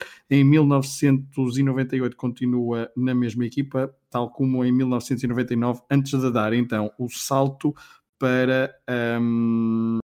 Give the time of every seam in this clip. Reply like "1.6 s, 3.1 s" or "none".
none